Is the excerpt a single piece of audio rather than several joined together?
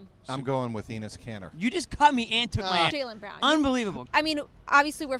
no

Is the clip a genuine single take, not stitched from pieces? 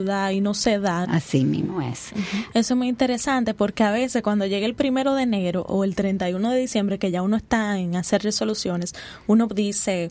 no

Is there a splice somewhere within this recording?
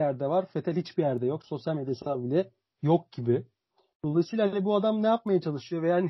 no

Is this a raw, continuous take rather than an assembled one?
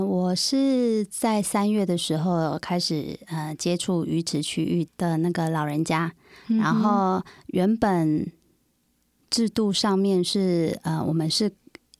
no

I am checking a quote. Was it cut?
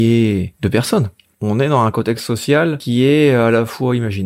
no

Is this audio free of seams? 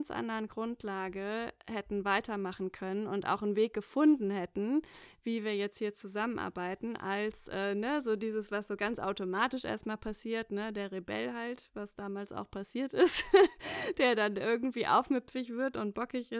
yes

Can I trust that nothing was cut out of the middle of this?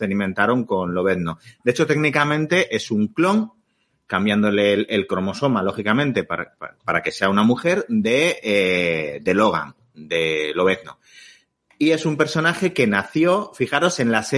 yes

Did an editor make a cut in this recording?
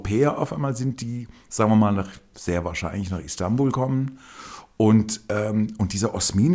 no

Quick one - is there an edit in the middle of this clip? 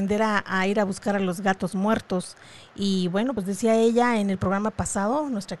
no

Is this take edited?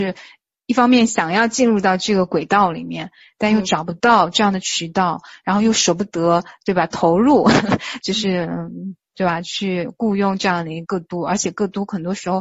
yes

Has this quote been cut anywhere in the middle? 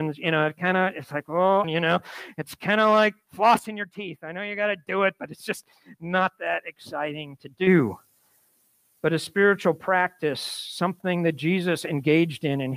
yes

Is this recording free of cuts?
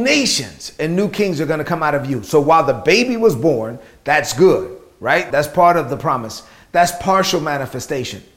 no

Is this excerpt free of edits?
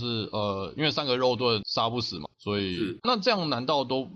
no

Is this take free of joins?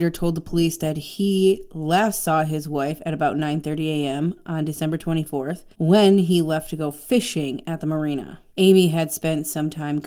no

